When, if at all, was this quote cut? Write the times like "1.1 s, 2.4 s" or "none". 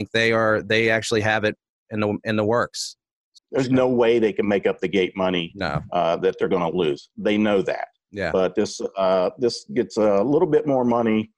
3.4 s